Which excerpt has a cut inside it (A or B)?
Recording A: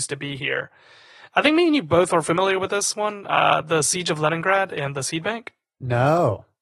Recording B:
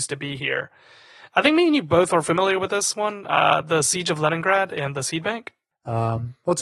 B